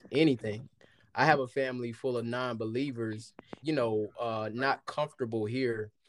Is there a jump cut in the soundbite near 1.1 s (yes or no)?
no